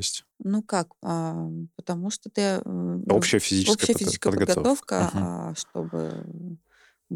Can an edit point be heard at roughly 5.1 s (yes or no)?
no